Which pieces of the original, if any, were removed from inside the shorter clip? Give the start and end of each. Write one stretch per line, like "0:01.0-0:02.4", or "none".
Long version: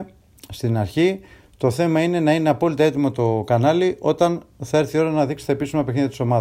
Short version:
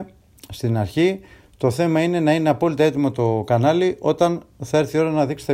none